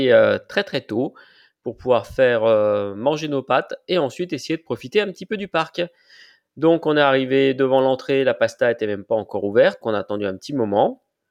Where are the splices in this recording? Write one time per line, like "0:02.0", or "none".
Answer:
0:09.8